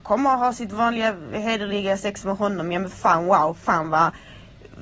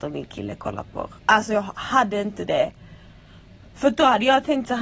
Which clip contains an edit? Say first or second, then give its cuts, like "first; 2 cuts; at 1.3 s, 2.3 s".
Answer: second; 1 cut; at 1.2 s